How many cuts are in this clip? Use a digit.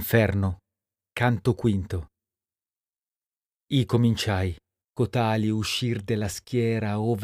1